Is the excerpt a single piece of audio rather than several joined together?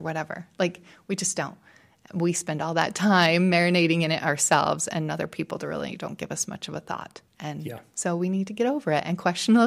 no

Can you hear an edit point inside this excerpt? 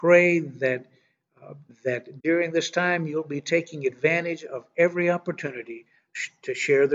yes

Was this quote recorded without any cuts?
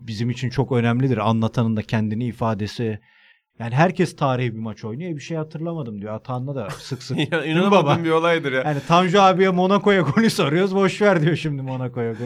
no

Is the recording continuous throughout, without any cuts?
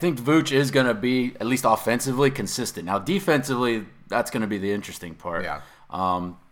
yes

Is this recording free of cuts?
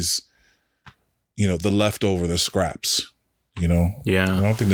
yes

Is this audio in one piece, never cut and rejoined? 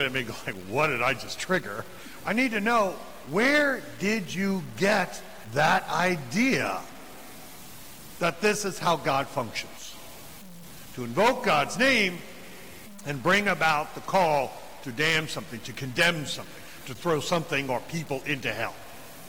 no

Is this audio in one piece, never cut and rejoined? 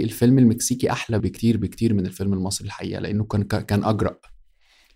no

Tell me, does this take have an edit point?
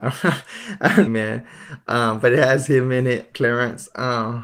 yes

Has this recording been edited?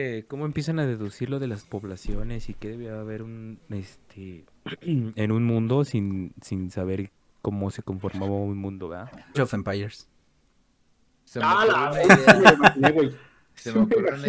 yes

